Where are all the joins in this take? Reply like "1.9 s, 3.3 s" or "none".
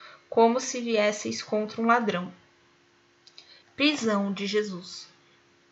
3.6 s